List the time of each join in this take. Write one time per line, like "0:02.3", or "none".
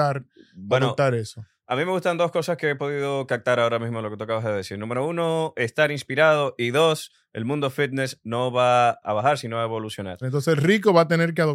0:09.0
0:10.2